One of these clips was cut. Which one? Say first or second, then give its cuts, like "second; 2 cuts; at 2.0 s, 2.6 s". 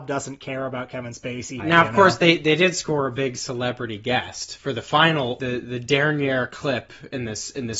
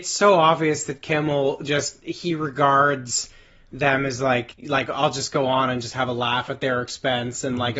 first; 1 cut; at 1.6 s